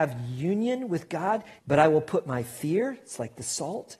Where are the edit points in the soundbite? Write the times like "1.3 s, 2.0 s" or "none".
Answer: 1.6 s